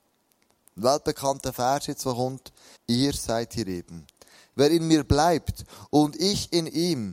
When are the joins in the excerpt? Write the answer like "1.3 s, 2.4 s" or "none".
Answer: 2.8 s